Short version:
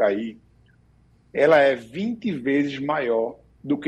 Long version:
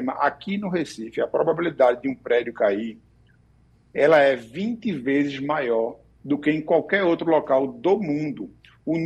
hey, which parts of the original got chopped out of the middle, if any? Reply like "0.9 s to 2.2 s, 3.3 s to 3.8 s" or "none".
none